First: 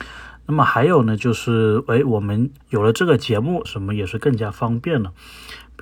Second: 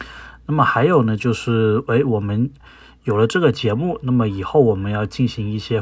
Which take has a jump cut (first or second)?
first